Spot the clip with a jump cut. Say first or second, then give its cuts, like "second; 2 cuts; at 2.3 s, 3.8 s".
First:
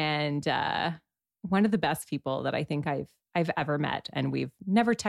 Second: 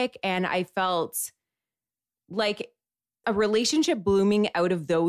second; 1 cut; at 3.2 s